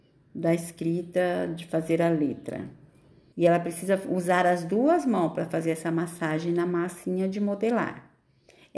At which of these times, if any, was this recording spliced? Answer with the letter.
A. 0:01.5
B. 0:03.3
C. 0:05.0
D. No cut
B